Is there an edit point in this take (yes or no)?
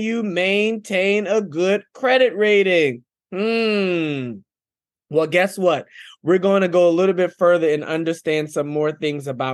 no